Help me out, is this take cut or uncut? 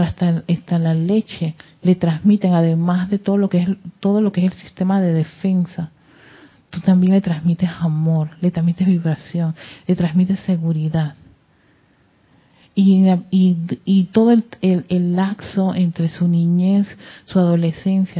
uncut